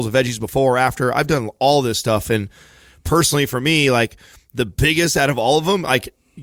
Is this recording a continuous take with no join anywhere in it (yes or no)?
yes